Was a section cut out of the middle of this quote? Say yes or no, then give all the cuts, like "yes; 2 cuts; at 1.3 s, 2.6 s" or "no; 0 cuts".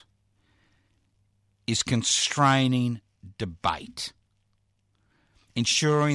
no; 0 cuts